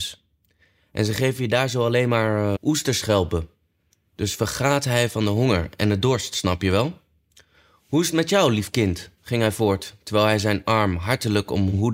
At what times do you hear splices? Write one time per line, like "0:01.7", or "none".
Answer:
0:02.6